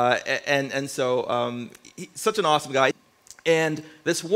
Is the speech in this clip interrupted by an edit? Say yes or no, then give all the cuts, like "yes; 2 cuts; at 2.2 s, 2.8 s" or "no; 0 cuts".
yes; 1 cut; at 2.9 s